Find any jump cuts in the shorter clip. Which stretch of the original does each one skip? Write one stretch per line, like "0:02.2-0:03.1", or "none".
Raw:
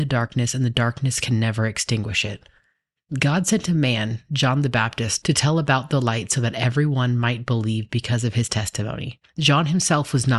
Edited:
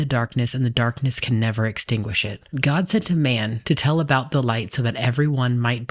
0:02.5-0:03.1
0:04.2-0:05.2